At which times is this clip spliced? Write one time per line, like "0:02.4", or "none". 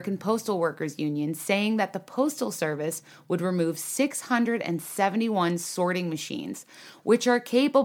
none